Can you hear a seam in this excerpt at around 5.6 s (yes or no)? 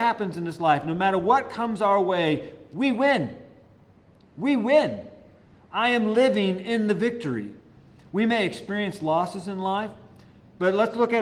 no